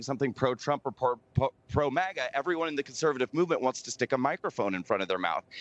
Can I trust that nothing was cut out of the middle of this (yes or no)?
yes